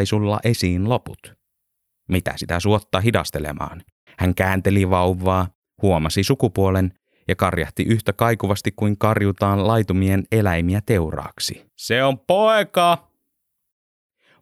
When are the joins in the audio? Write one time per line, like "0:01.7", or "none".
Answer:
0:04.1
0:11.7